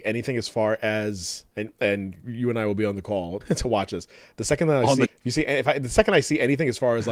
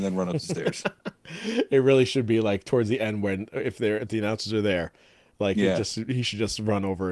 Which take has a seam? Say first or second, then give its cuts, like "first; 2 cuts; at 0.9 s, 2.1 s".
first; 2 cuts; at 3.4 s, 5.1 s